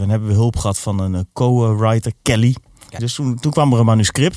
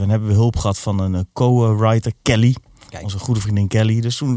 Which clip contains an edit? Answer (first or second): first